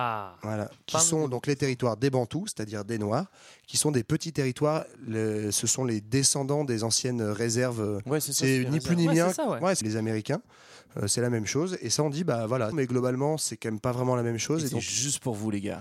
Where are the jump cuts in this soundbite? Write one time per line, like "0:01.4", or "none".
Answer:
0:09.8
0:12.7